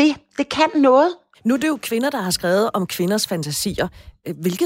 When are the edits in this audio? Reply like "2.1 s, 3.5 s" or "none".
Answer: 1.3 s